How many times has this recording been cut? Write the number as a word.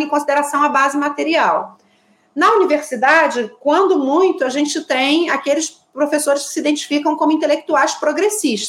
zero